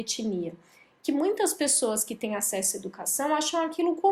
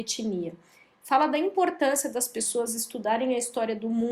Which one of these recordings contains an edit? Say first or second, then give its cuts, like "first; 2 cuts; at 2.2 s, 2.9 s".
second; 1 cut; at 0.9 s